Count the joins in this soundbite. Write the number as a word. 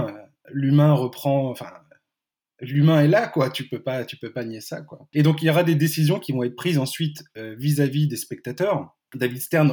zero